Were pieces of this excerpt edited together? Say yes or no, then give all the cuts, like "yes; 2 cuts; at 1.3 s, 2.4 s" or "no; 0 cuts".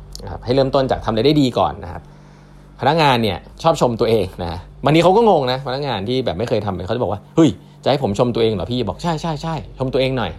yes; 1 cut; at 3.5 s